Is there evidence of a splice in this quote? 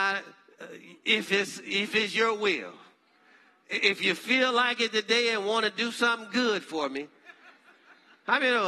no; 0 cuts

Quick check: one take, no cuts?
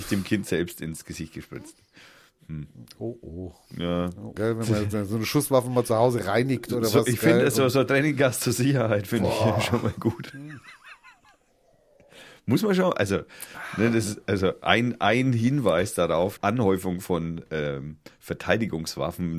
no; 2 cuts; at 4.4 s, 16.4 s

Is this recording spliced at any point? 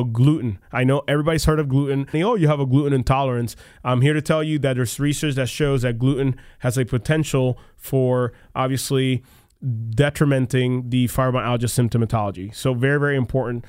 yes; 1 cut; at 2.1 s

